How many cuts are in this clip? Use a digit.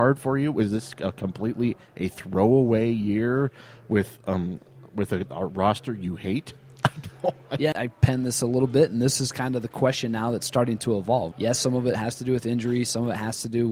2